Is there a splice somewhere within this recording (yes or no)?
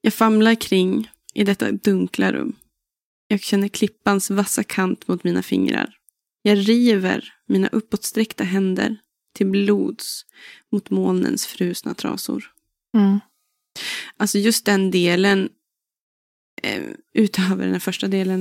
no